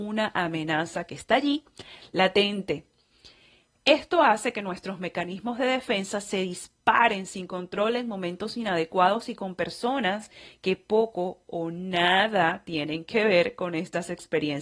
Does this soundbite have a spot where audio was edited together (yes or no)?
no